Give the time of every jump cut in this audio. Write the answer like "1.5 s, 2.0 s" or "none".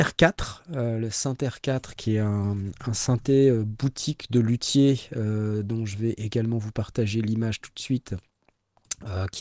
none

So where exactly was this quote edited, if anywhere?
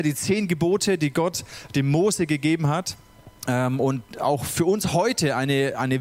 3.4 s

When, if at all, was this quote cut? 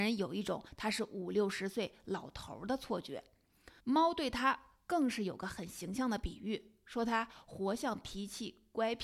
3.8 s

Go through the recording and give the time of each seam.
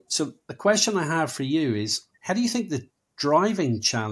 2.1 s

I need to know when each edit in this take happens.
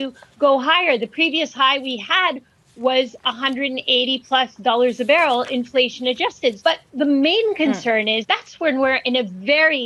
6.6 s, 8.2 s

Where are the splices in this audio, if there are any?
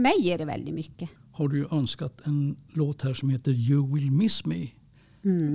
1.2 s, 2.7 s

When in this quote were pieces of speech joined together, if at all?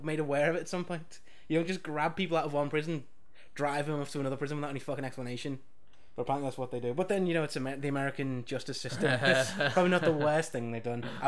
none

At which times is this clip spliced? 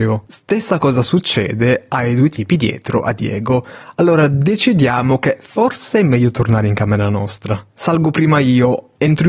none

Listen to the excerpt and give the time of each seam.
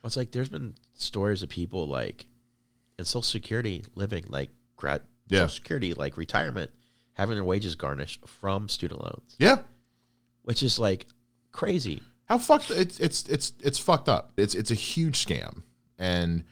14.4 s

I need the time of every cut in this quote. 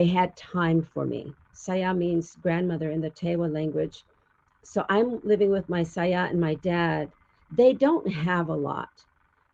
1.5 s

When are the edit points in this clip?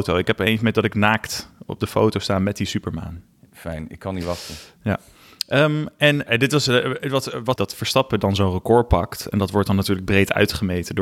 6.3 s, 7.6 s

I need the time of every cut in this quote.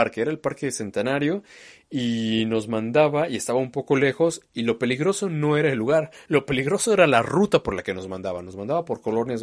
none

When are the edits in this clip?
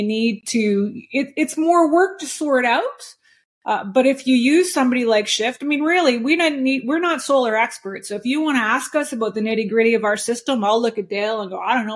none

